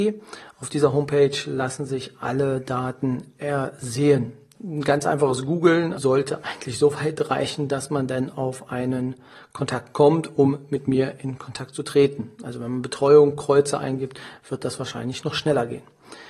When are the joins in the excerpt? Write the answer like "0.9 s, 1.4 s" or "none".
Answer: 4.6 s, 6.0 s